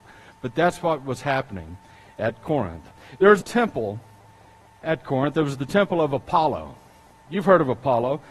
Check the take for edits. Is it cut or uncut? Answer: cut